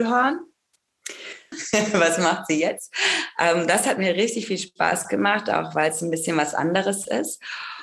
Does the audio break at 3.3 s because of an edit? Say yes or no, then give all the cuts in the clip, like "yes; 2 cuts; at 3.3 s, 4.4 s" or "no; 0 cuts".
no; 1 cut; at 1.5 s